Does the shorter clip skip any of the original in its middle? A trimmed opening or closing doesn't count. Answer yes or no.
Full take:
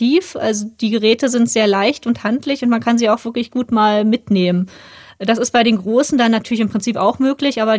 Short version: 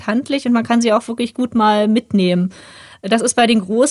no